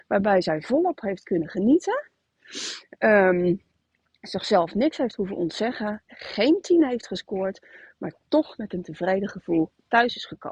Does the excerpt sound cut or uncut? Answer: uncut